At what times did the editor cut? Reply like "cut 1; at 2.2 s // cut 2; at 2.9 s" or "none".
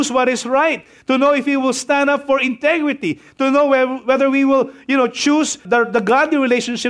cut 1; at 5.6 s